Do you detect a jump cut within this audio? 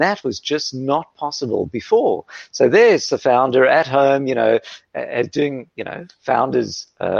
no; 0 cuts

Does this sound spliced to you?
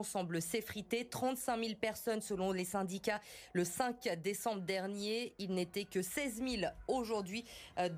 no; 0 cuts

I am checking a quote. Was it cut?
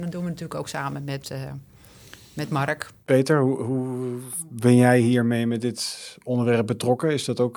no; 0 cuts

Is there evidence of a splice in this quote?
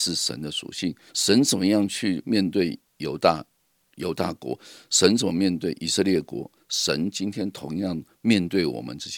yes; 1 cut; at 1.1 s

